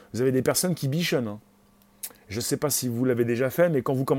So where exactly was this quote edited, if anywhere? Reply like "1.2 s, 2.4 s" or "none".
none